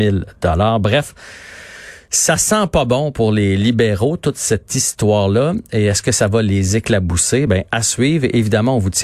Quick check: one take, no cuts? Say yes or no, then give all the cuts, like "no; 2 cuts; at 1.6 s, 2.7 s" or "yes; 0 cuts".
yes; 0 cuts